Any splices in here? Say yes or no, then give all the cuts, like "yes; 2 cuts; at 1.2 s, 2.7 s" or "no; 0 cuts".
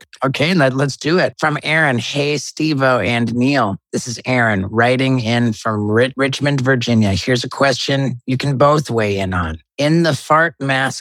no; 0 cuts